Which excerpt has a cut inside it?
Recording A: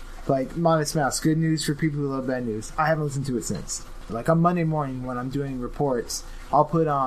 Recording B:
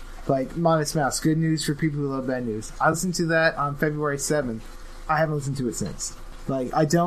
A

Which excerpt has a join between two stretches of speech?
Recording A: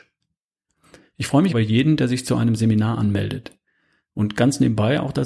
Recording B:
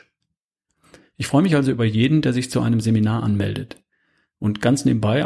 A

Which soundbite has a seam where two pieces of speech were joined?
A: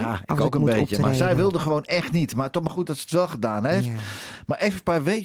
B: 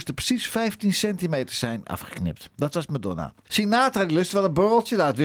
B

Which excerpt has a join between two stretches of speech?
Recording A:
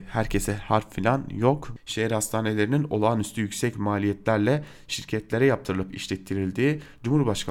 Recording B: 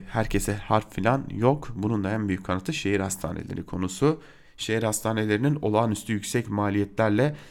A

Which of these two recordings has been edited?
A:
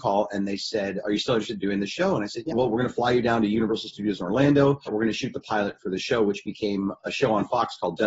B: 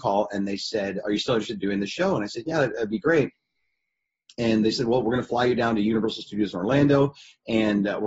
A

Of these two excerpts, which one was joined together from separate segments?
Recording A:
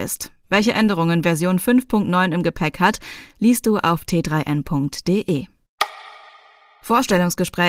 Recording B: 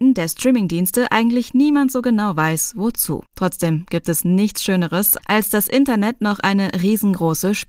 B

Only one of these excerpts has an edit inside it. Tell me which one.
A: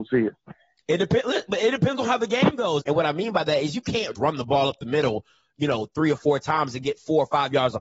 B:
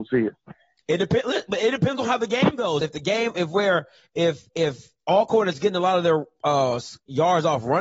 A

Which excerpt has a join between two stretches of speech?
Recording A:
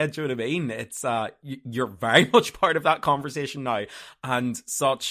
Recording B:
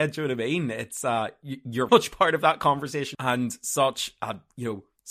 B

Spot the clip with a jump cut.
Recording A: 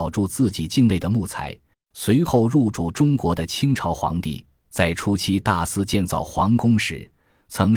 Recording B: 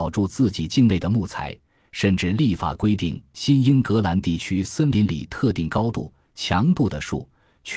A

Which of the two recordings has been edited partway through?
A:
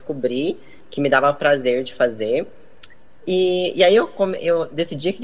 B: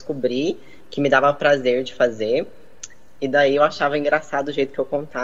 B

